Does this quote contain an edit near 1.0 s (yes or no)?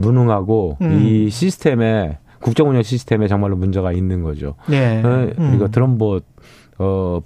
no